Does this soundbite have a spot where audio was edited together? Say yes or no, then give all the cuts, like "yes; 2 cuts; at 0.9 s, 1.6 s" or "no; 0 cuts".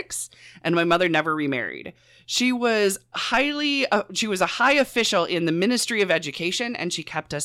yes; 1 cut; at 3.1 s